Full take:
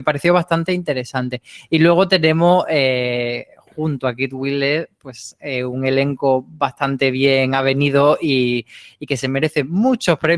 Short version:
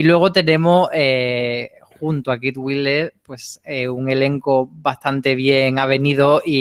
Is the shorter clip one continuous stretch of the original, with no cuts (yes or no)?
yes